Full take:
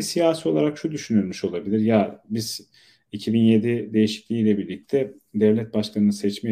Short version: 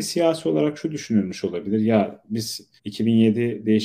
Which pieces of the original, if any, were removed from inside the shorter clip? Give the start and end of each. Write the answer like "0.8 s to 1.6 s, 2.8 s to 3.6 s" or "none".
2.8 s to 3.0 s

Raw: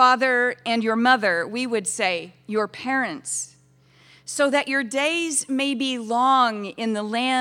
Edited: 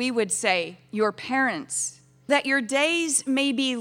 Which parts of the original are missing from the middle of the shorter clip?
3.8 s to 4.5 s

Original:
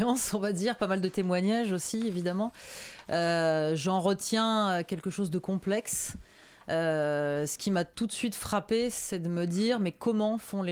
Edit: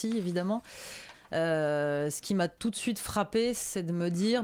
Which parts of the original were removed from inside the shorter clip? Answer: 3.0 s to 6.5 s

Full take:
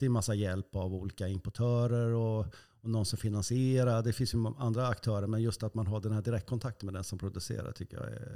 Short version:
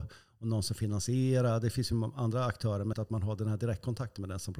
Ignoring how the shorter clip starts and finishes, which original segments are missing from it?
5.4 s to 5.6 s

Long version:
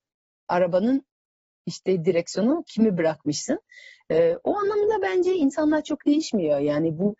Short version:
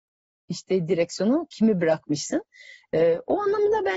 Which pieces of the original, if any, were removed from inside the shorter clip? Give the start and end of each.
none

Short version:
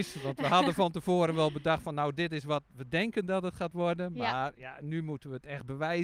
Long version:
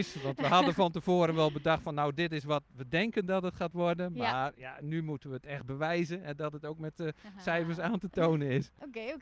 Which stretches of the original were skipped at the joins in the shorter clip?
none

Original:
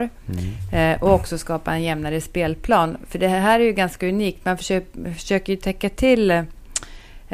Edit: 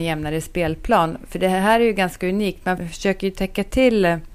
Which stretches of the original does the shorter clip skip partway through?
4.6 s to 5.0 s

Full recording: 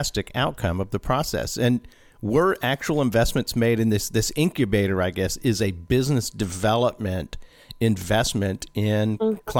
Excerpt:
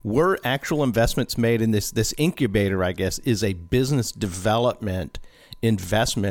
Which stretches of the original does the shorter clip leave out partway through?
none

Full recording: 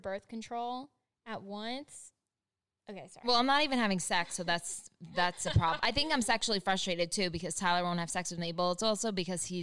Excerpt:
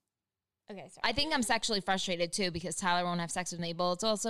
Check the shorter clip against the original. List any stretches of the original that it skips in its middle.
3.2 s to 5.8 s

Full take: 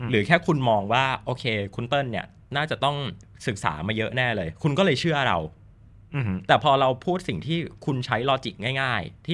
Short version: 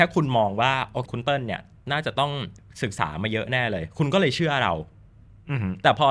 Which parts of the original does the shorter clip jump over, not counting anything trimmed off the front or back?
1.4 s to 1.7 s

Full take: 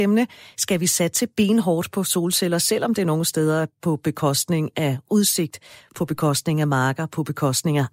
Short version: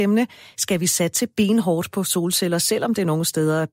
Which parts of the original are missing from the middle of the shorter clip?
none

